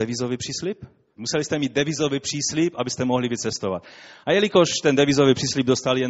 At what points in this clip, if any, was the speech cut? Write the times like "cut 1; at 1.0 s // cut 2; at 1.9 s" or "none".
cut 1; at 1.2 s